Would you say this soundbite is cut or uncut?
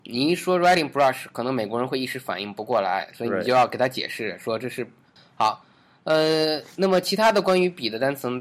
cut